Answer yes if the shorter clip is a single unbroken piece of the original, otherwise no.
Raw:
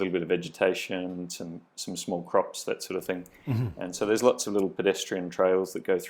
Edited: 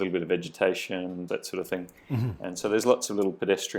no